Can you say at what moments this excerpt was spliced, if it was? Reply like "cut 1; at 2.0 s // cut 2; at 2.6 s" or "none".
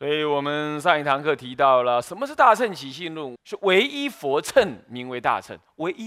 cut 1; at 3.4 s